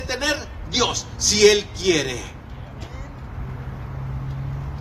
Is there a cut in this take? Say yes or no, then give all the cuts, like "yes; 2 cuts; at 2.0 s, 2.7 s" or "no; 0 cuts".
no; 0 cuts